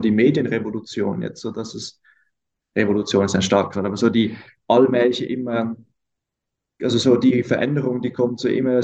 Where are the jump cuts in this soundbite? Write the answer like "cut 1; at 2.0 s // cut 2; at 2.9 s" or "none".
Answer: none